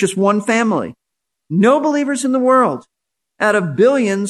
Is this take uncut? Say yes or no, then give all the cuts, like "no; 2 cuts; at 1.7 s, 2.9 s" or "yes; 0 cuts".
yes; 0 cuts